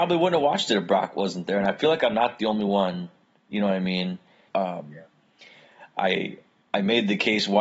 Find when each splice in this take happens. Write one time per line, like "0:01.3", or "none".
0:04.5